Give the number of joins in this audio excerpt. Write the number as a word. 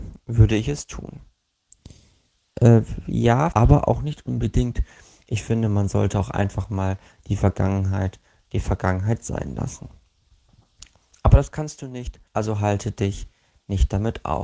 two